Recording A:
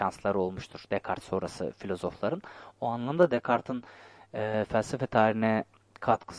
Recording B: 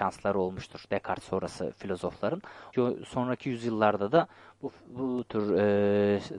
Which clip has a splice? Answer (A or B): B